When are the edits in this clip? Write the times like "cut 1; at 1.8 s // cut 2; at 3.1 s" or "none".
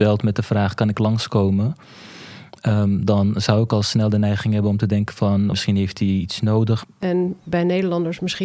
cut 1; at 5.5 s // cut 2; at 6.8 s